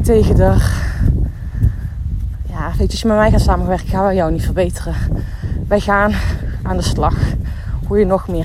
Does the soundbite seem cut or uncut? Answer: uncut